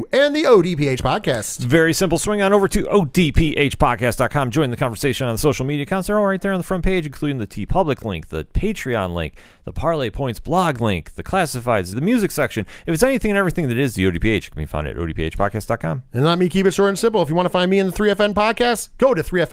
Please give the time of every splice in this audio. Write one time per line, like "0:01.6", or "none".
0:11.9